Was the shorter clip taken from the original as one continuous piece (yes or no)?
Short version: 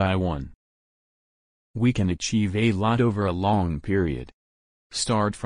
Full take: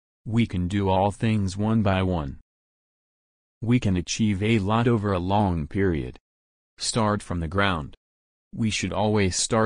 yes